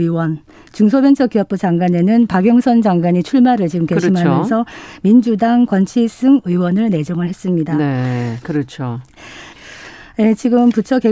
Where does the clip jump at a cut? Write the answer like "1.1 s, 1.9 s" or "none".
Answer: 8.4 s, 9.5 s